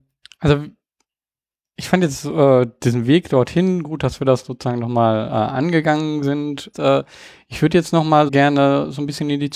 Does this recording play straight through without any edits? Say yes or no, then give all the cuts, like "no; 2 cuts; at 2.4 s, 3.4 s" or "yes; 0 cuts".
no; 2 cuts; at 6.7 s, 8.3 s